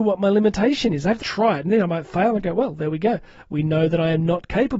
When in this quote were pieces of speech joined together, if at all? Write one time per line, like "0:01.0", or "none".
0:01.2